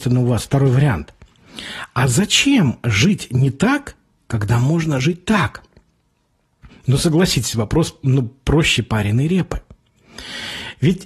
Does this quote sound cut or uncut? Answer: uncut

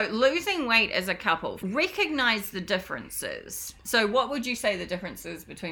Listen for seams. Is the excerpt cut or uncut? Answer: cut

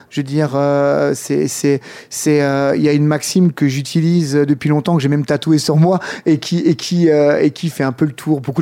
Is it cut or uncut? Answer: uncut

